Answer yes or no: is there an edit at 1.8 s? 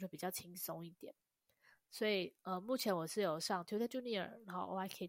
no